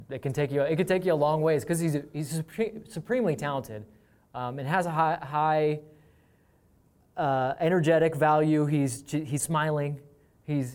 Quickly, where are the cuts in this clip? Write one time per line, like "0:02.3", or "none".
0:09.4